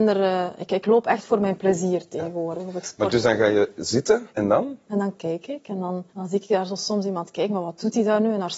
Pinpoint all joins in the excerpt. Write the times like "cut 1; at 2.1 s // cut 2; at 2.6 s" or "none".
cut 1; at 4.3 s // cut 2; at 6.1 s